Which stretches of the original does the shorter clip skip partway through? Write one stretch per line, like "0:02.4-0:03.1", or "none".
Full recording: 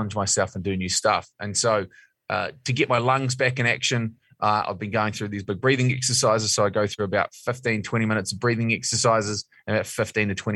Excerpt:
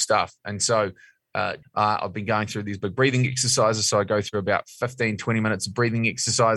0:02.6-0:04.3